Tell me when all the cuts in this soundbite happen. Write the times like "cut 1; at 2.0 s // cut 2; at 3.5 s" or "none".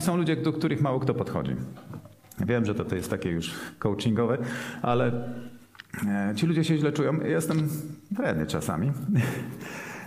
none